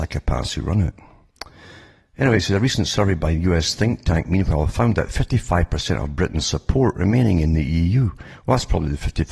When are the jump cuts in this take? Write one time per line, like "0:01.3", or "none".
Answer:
none